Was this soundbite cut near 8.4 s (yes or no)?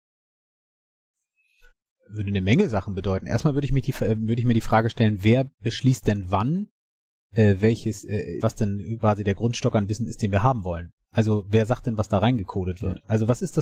yes